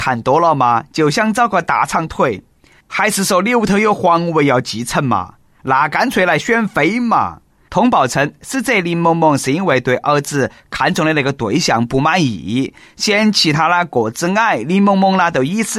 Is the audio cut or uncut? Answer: cut